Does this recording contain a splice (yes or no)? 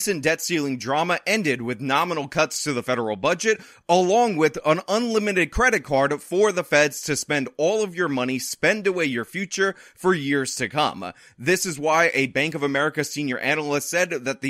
no